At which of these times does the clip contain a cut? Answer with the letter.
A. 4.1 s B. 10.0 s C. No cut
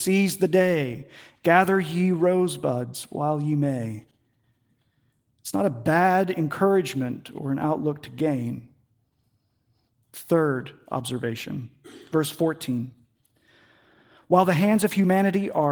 C